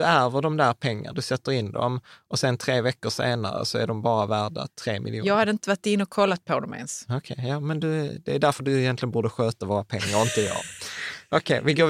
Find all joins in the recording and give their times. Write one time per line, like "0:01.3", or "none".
0:01.1